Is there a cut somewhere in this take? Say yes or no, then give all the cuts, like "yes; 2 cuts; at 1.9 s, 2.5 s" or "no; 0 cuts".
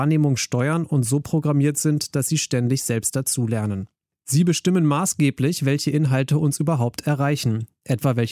no; 0 cuts